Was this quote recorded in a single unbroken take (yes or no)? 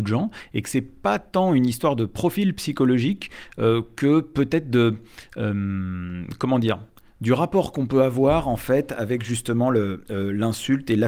yes